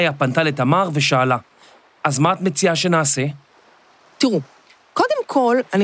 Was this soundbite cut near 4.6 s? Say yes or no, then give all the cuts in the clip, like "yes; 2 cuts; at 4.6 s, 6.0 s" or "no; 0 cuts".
no; 0 cuts